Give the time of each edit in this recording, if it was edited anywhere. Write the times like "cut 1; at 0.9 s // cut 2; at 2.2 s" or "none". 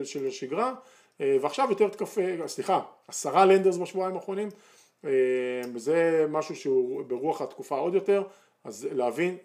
cut 1; at 6.6 s